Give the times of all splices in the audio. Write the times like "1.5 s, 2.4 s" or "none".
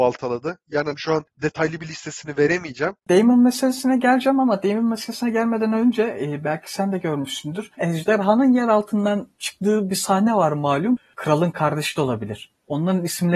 3.0 s, 7.8 s, 11.1 s